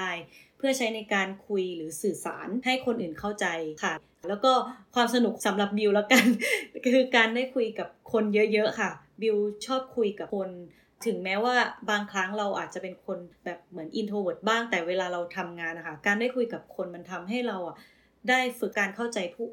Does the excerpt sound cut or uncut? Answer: uncut